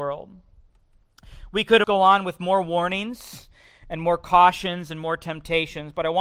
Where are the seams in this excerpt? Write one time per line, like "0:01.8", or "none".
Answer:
0:01.8